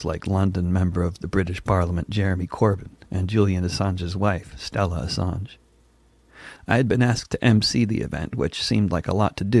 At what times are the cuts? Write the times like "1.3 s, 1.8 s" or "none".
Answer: 6.6 s